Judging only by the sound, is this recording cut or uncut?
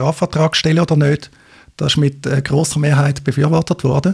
uncut